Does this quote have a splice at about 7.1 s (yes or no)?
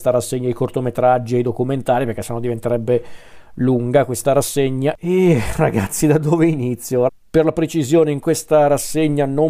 yes